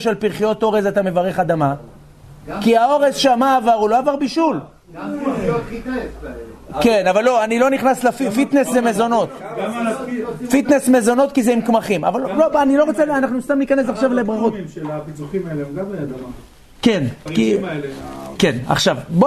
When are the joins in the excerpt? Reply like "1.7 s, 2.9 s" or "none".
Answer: 17.3 s, 18.4 s

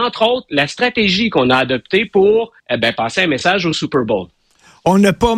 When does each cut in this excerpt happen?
2.6 s

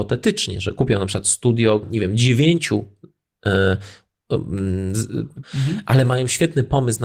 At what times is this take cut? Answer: 1.8 s, 5.4 s

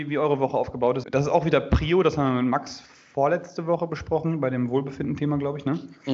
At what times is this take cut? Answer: 1.0 s

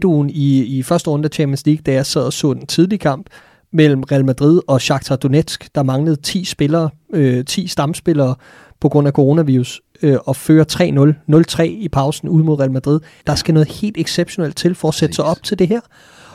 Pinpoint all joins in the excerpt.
13.2 s

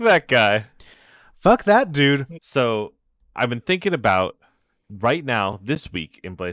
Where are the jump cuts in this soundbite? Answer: 2.4 s

